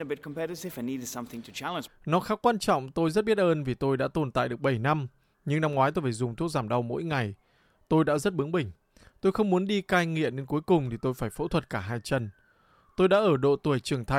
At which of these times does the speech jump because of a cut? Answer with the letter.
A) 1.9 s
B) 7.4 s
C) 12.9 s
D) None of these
A